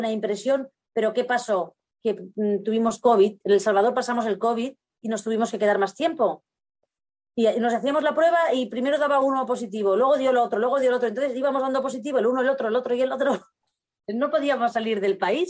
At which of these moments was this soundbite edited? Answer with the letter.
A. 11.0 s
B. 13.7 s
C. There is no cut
C